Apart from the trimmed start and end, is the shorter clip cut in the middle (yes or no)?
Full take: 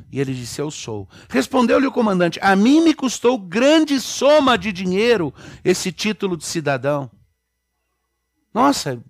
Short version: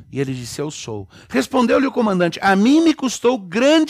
no